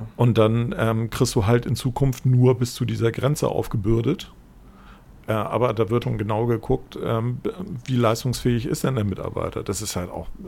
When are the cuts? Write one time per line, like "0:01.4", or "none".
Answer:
0:06.0

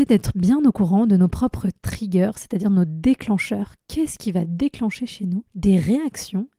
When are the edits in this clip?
0:05.5

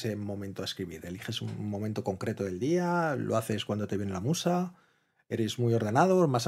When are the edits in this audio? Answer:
none

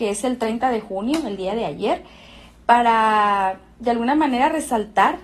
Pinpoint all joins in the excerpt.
0:03.8

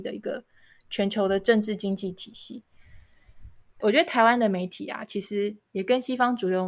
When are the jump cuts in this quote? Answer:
0:03.8

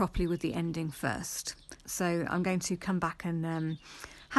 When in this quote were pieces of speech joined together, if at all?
0:01.8

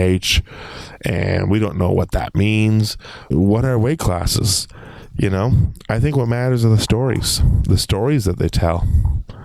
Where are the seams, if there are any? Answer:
0:03.3

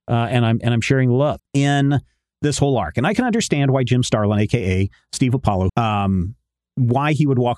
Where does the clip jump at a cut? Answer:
0:01.4
0:05.7

